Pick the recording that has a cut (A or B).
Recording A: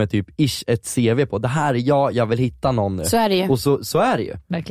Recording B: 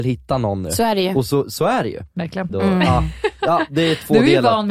B